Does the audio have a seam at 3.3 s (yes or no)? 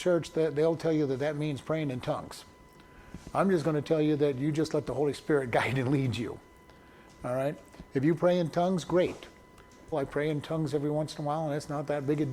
no